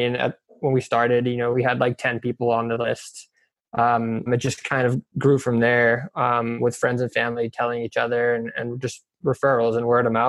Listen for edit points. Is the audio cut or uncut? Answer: cut